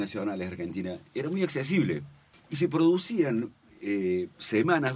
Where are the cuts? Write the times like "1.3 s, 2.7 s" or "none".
2.3 s